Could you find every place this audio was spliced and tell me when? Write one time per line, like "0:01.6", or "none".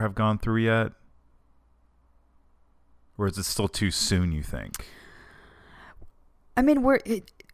none